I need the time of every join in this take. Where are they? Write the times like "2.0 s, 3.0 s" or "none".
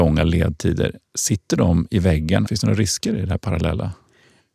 2.5 s